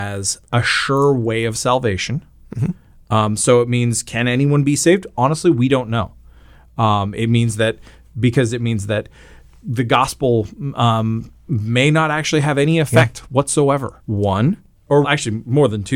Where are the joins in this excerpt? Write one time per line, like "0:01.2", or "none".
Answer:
0:14.0
0:15.0